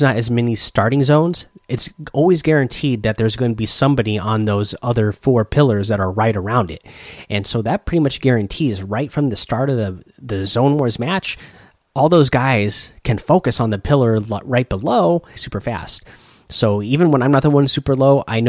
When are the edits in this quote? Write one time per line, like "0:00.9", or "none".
0:11.8
0:15.4